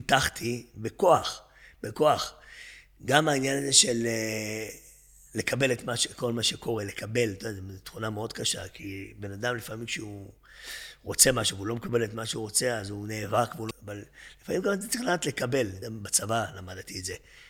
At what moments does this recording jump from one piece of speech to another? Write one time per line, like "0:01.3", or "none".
0:13.7
0:15.8